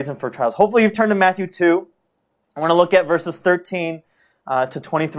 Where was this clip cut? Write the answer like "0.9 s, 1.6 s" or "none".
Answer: none